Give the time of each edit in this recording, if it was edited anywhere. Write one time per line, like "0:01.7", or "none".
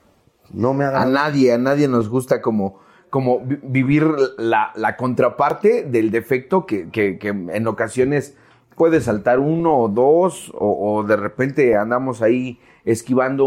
none